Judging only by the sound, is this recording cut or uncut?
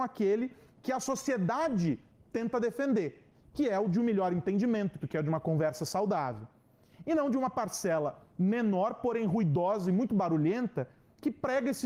cut